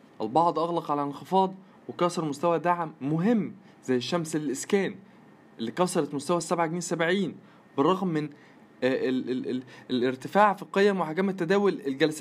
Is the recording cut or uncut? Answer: uncut